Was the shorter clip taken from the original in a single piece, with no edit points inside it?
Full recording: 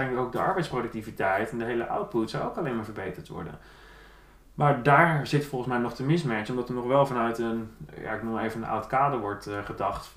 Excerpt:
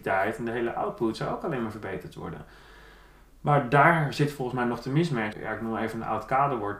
no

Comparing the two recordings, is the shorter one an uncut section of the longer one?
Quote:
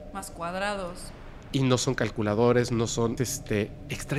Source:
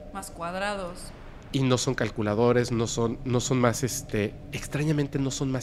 no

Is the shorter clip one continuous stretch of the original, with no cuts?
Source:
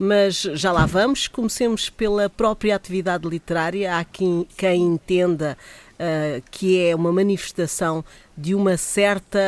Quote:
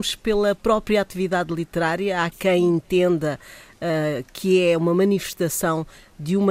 no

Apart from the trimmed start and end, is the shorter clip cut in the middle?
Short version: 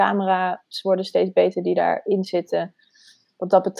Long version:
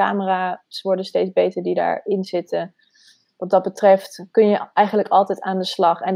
no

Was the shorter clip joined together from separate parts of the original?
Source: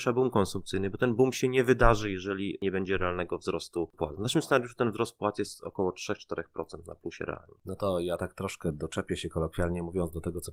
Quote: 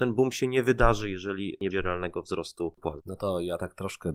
yes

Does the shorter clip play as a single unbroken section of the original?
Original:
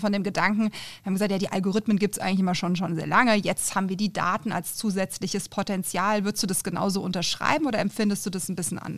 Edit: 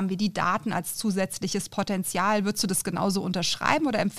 yes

